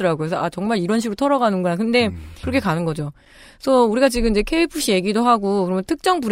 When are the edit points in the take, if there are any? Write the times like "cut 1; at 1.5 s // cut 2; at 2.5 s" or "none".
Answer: cut 1; at 2.4 s